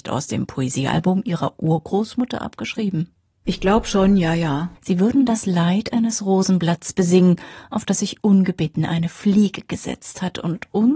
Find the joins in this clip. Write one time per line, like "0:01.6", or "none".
0:03.4
0:04.7